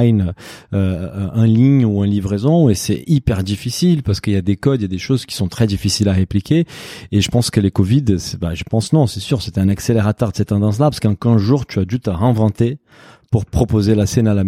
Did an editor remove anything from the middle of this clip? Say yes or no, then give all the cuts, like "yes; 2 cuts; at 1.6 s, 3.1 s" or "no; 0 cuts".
no; 0 cuts